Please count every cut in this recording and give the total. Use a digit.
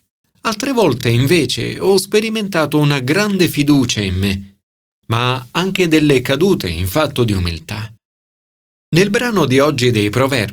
0